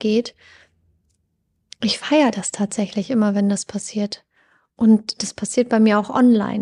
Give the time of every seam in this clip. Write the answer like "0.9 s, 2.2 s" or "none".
none